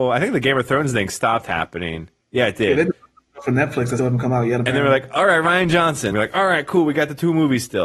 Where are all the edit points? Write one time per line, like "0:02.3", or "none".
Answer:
0:04.0
0:06.1